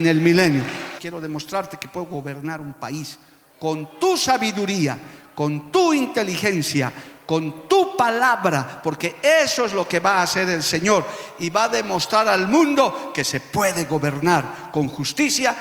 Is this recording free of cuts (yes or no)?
no